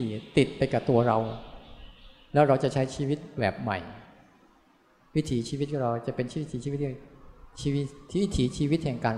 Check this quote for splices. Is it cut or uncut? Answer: uncut